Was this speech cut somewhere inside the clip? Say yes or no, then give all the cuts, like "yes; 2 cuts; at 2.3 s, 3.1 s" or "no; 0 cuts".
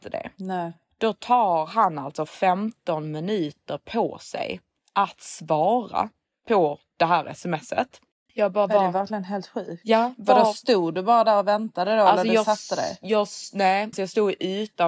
yes; 1 cut; at 13.9 s